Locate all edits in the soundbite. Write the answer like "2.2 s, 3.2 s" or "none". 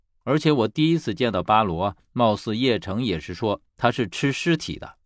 none